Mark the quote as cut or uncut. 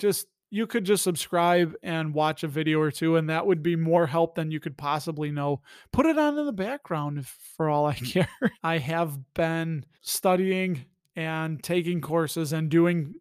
cut